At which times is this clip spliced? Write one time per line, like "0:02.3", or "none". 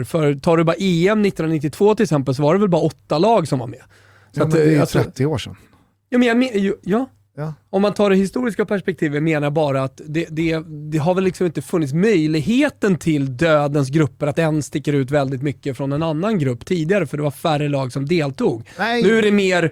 none